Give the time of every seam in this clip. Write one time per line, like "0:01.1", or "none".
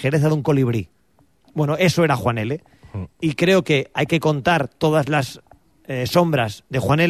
none